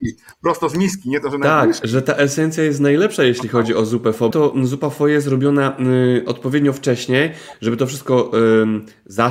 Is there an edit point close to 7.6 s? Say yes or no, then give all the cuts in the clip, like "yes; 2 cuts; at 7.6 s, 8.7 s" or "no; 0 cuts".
no; 2 cuts; at 1.8 s, 4.3 s